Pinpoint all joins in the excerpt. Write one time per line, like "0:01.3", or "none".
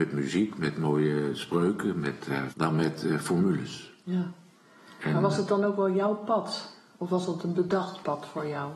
0:02.5

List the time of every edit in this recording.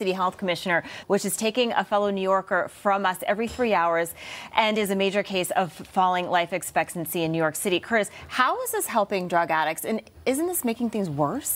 0:01.0

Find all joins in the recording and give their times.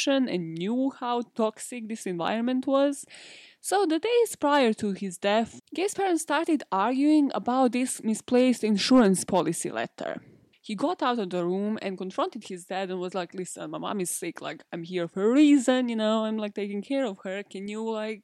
0:10.5

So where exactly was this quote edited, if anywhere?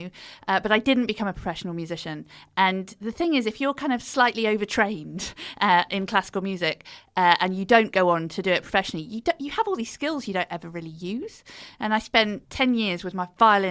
0:12.4

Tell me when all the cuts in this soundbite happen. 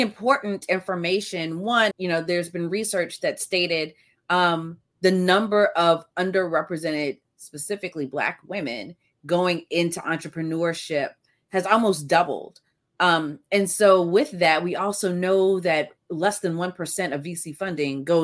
0:01.9
0:04.1

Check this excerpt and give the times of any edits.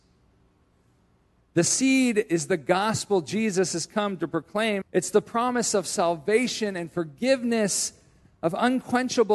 0:01.5
0:04.8

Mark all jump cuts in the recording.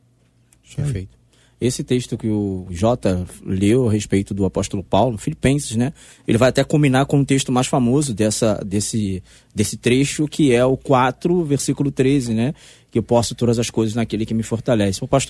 none

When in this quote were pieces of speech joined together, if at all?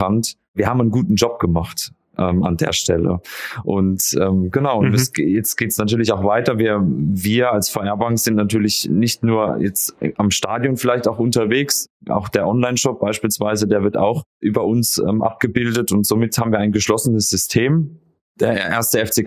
none

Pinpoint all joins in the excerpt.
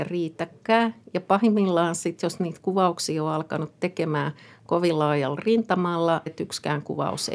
0:06.3

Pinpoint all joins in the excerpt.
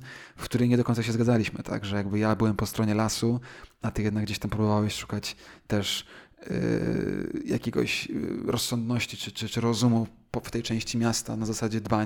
none

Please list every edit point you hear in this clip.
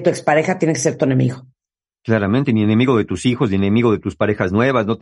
none

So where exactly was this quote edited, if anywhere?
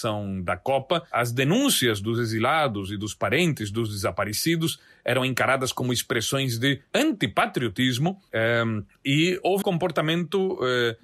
0:09.6

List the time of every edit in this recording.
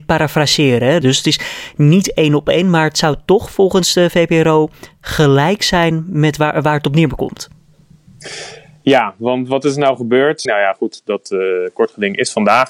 0:01.0
0:10.5

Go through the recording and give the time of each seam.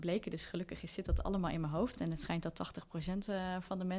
none

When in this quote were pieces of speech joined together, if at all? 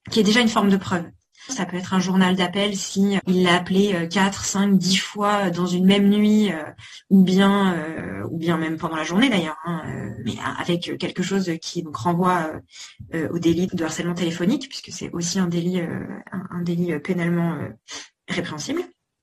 0:01.5
0:03.2
0:13.7

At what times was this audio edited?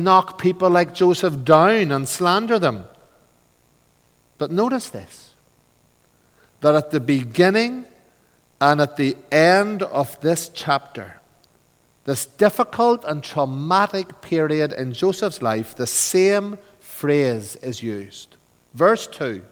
none

